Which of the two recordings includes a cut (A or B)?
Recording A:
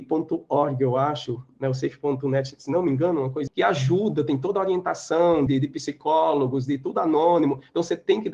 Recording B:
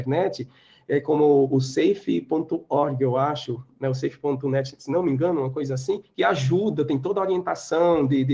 A